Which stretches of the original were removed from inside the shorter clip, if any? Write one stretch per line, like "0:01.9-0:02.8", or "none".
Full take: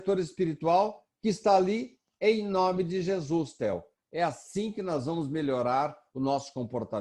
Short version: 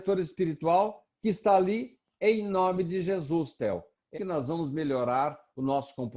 0:04.1-0:04.7